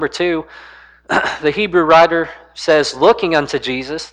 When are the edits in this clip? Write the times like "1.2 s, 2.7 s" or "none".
none